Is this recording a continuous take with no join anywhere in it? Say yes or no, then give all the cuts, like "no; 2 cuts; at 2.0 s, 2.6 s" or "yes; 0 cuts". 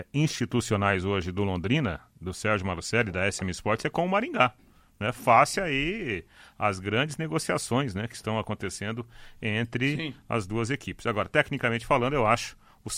yes; 0 cuts